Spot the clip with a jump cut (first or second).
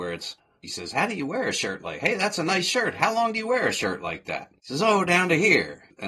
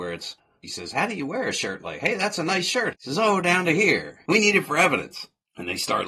second